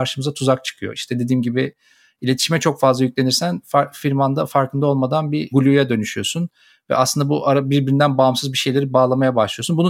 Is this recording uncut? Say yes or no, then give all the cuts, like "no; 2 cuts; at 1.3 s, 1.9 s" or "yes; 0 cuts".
yes; 0 cuts